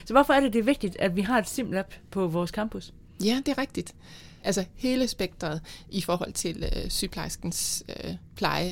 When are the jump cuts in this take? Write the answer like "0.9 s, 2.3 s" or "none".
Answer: 4.4 s